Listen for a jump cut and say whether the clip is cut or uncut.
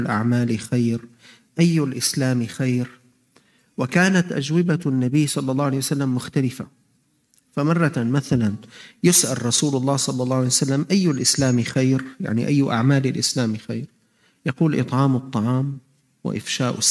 uncut